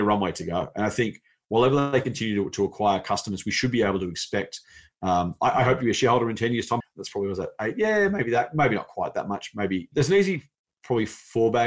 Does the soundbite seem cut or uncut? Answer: cut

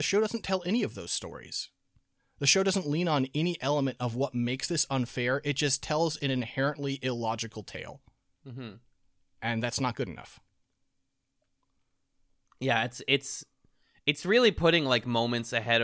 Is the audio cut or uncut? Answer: uncut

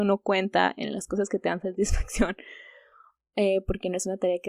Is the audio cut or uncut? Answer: uncut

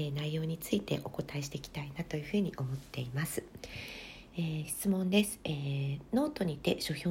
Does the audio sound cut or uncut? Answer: uncut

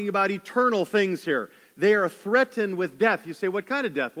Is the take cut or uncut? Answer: uncut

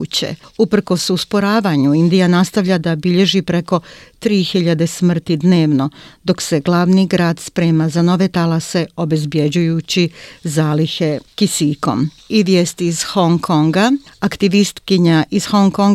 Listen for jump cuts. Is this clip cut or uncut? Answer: uncut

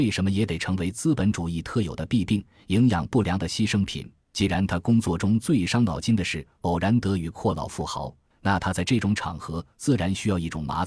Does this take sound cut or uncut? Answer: cut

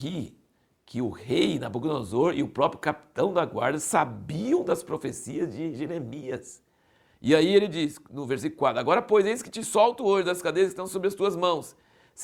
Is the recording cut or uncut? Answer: uncut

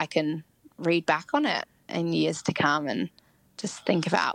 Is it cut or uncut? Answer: uncut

